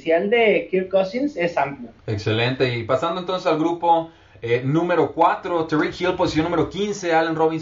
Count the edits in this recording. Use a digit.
1